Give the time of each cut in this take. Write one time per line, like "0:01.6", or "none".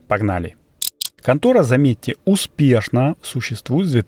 0:01.2